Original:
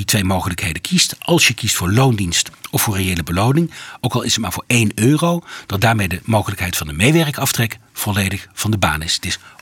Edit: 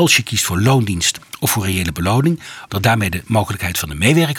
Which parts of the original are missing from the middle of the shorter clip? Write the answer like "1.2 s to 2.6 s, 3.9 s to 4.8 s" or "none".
4.0 s to 5.7 s